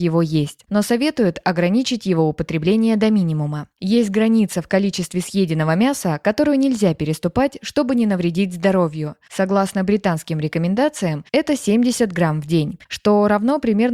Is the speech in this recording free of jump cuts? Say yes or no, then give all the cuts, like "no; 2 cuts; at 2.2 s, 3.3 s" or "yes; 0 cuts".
yes; 0 cuts